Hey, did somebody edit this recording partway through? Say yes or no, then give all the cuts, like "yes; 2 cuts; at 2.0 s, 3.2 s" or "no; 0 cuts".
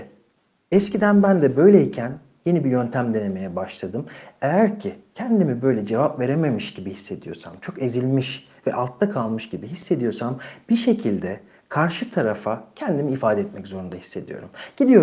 no; 0 cuts